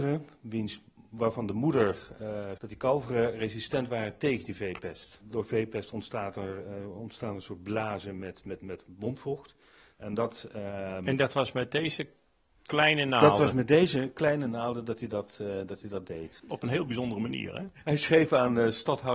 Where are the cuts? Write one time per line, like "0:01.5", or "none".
0:02.6
0:09.9
0:16.4